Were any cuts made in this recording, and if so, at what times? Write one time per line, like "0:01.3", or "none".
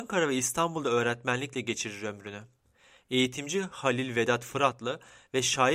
none